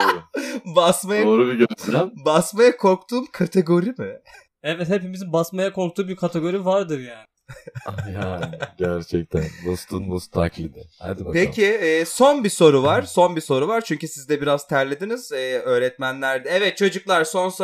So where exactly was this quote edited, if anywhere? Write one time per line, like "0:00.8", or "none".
none